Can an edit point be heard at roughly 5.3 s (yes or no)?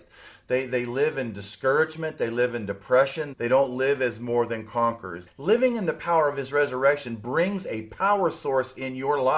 yes